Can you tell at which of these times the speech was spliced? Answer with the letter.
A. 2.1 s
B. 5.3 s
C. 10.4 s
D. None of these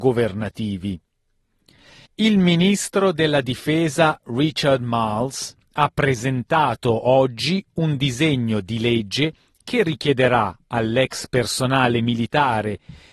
A